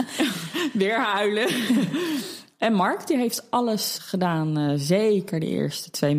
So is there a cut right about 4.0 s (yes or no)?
yes